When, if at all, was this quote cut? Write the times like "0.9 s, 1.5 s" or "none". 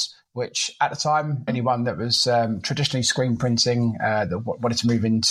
1.5 s